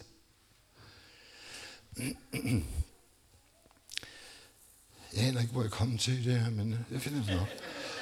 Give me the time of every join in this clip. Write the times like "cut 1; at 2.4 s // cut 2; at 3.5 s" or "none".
none